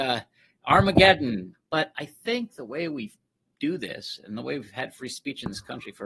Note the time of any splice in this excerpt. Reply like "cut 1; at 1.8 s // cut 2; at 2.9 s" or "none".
cut 1; at 1.5 s